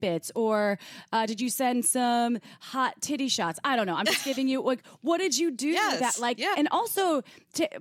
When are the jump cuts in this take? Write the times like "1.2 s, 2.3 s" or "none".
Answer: 6.5 s